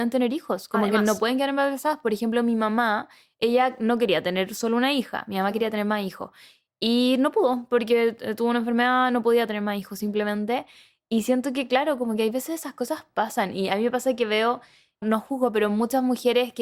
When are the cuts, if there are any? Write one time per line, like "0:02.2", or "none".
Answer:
0:15.0